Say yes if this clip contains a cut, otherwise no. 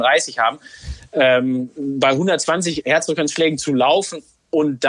no